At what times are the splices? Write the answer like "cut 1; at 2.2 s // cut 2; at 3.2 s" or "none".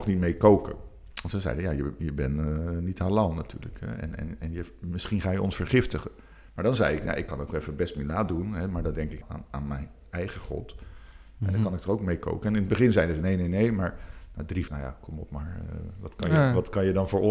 cut 1; at 9.2 s // cut 2; at 14.7 s